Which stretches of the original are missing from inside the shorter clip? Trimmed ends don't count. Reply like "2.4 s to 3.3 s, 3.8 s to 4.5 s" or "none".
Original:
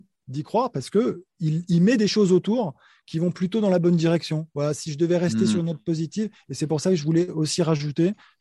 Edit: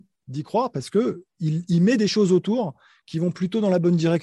none